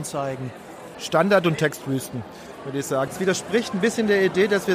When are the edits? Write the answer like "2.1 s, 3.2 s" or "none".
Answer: 0.9 s, 3.1 s